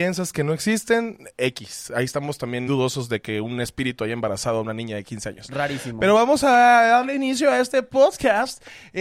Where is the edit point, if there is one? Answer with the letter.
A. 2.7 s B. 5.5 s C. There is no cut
A